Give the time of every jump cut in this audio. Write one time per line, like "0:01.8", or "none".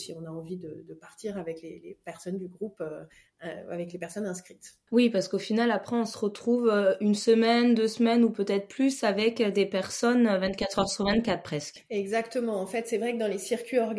0:04.9